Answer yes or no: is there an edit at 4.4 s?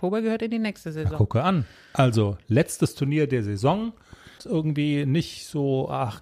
yes